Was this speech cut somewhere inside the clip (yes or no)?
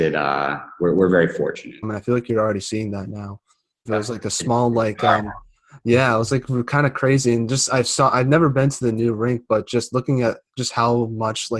yes